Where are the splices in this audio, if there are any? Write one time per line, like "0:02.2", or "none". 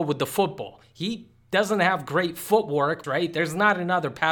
0:03.0